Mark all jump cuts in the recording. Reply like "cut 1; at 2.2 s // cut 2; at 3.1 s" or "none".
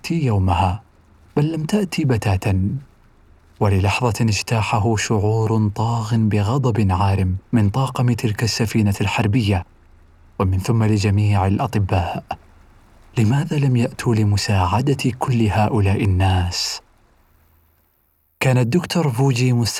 cut 1; at 7.5 s